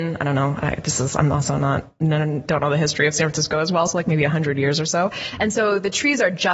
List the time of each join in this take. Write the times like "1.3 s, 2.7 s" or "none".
none